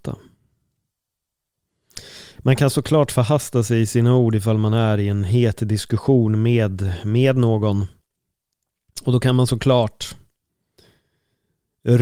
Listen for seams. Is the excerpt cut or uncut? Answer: uncut